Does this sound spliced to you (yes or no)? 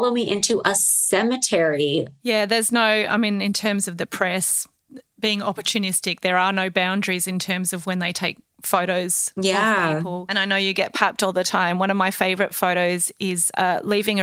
no